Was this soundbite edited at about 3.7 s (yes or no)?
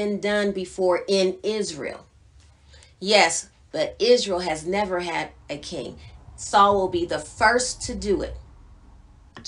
yes